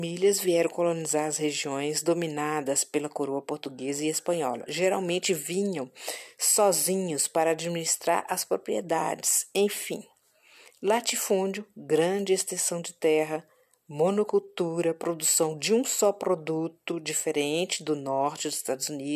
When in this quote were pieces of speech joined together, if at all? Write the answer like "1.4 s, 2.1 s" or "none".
none